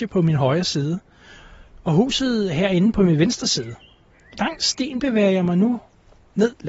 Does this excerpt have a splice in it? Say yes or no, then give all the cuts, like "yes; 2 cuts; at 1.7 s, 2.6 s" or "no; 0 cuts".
no; 0 cuts